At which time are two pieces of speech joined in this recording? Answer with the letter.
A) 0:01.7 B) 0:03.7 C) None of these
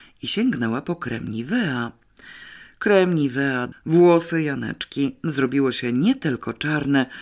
B